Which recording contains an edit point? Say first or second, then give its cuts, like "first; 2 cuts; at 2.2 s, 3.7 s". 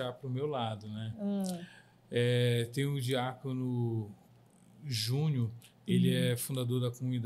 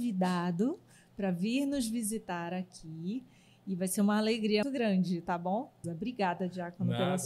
second; 2 cuts; at 4.6 s, 5.8 s